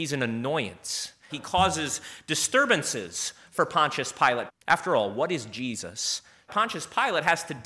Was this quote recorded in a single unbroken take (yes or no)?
no